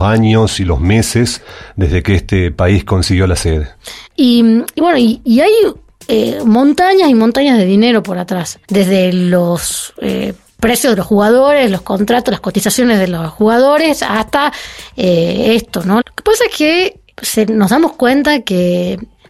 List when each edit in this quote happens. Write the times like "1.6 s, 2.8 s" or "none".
4.1 s, 8.6 s, 16.0 s